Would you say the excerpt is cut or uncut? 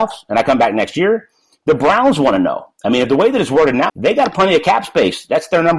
cut